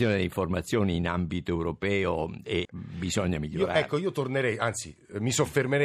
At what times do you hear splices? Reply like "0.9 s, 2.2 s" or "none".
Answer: 2.7 s